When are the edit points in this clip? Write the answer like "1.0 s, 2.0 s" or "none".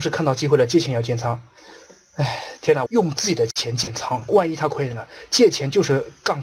2.9 s, 4.3 s

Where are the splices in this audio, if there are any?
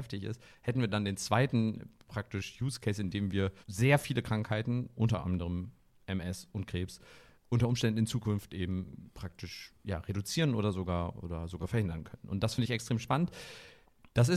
3.6 s

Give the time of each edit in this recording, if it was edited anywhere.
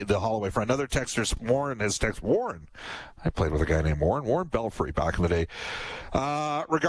none

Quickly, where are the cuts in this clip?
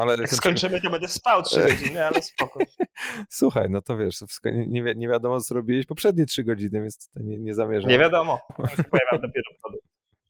8.5 s

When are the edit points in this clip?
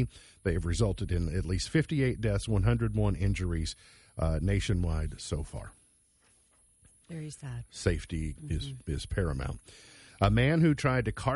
8.3 s

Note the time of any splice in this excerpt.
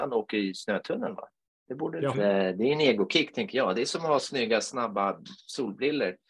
2.1 s

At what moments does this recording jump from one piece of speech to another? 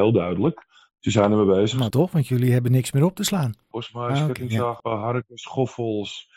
1.9 s, 3.7 s, 4.8 s

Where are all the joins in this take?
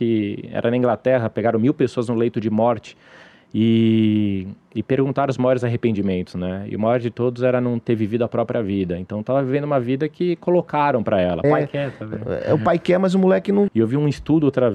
11.4 s, 13.7 s

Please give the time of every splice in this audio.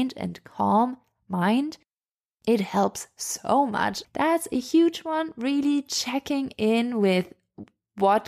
4.0 s

